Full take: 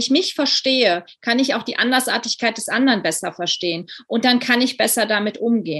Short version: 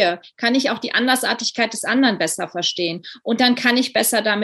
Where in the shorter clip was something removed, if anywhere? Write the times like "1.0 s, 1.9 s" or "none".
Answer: none